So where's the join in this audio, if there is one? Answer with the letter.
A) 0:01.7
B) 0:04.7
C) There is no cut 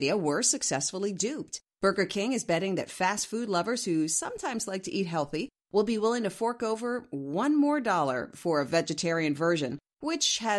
C